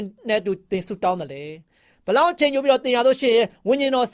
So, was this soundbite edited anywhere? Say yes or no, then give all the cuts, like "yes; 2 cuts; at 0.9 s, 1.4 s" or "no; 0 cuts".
no; 0 cuts